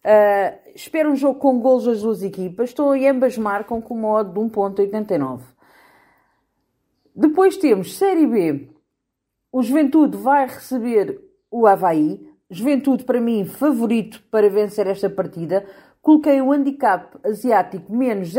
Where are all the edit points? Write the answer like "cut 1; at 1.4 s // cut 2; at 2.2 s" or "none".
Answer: none